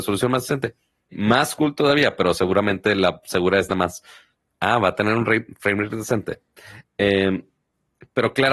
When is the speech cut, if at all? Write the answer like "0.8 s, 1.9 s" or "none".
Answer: 1.1 s